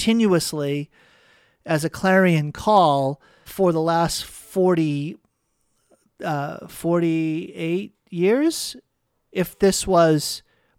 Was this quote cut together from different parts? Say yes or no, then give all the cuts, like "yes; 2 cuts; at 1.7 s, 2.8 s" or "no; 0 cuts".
yes; 1 cut; at 3.5 s